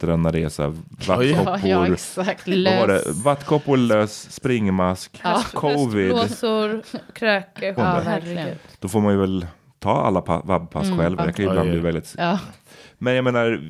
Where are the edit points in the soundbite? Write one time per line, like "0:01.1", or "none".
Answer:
0:07.8
0:11.2
0:12.5

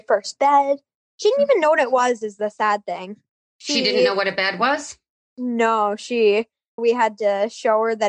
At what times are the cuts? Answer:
0:06.8

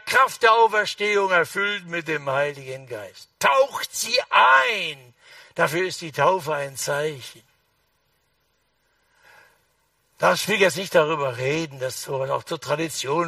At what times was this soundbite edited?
none

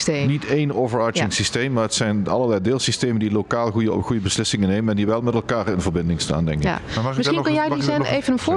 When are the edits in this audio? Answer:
none

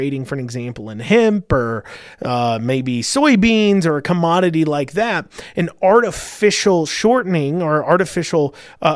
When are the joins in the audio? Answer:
none

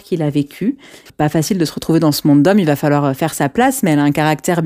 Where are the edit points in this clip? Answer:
0:01.1

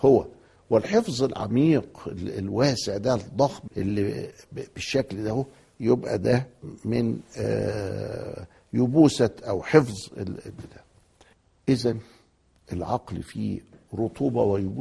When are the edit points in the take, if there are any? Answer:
0:03.7

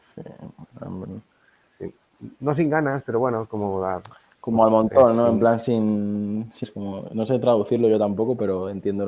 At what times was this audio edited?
0:06.6

